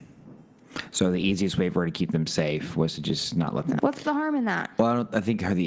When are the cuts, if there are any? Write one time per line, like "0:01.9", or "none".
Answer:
0:03.8